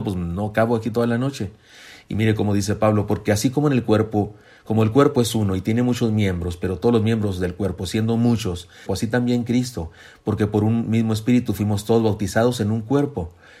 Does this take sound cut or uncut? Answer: cut